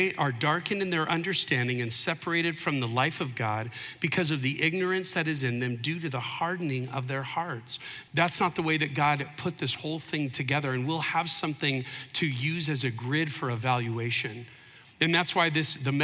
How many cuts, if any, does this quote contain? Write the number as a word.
two